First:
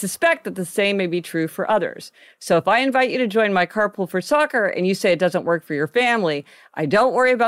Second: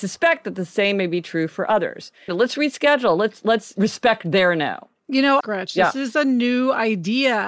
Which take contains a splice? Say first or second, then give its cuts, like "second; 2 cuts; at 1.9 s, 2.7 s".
second; 2 cuts; at 2.3 s, 5.4 s